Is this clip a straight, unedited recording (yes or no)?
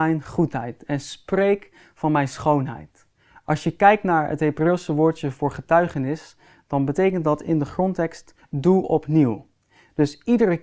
yes